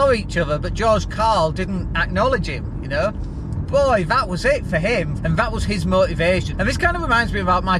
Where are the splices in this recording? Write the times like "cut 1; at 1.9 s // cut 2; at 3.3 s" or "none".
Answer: cut 1; at 5.2 s // cut 2; at 6.5 s